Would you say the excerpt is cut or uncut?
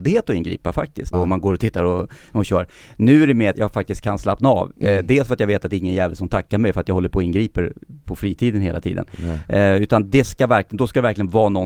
cut